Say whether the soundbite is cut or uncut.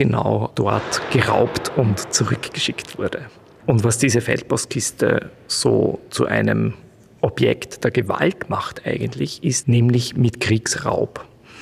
cut